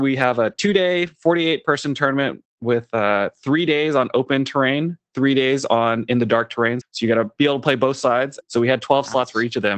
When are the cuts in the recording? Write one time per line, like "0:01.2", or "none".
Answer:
0:06.8
0:08.4